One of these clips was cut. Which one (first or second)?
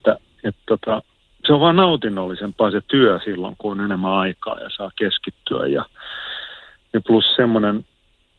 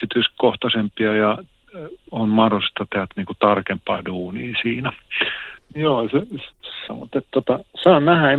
second